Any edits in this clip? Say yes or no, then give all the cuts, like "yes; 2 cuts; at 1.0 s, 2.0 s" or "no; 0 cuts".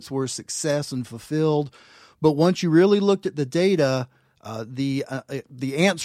no; 0 cuts